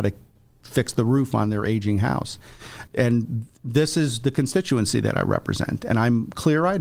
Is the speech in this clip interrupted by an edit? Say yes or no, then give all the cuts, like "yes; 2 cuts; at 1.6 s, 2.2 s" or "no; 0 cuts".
yes; 1 cut; at 2.9 s